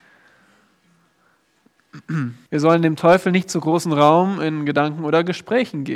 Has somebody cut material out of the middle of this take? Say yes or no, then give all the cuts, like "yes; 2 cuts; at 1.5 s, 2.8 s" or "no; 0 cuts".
yes; 1 cut; at 2.5 s